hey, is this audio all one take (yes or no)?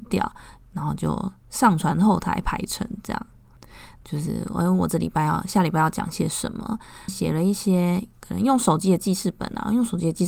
no